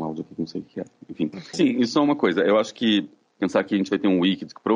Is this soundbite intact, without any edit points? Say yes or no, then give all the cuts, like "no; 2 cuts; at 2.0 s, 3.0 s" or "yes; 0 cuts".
no; 2 cuts; at 1.5 s, 3.3 s